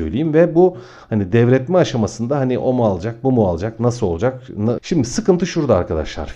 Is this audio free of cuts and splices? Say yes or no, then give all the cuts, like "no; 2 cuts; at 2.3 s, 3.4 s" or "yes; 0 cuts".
no; 1 cut; at 4.8 s